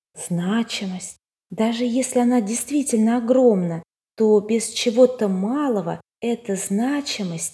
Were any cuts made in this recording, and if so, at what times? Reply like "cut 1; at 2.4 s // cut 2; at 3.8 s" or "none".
none

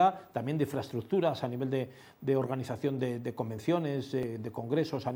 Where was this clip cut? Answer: none

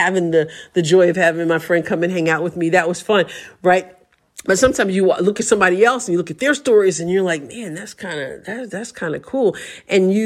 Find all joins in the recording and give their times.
none

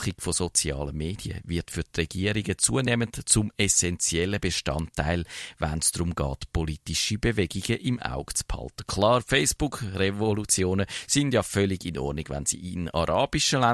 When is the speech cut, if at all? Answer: none

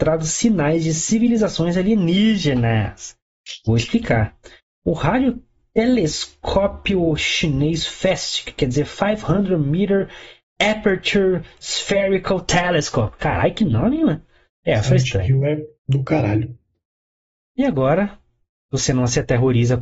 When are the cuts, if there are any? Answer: cut 1; at 14.5 s // cut 2; at 15.7 s

